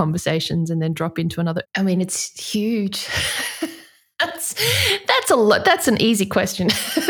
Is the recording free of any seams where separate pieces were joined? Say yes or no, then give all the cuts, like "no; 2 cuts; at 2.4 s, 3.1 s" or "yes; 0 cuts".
no; 1 cut; at 1.6 s